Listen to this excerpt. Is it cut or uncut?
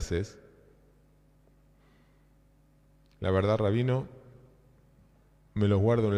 uncut